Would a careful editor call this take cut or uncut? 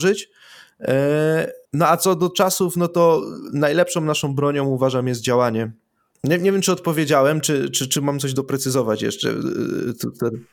cut